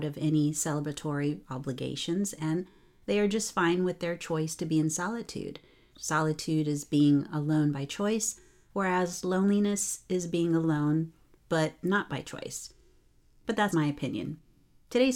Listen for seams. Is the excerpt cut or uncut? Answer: cut